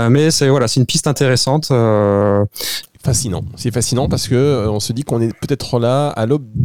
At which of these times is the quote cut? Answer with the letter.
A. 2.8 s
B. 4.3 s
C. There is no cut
A